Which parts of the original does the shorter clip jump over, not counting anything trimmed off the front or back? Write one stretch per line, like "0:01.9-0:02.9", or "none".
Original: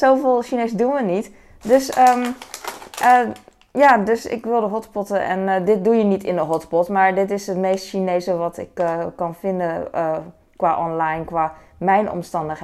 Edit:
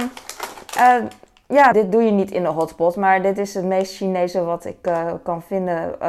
0:04.0-0:05.6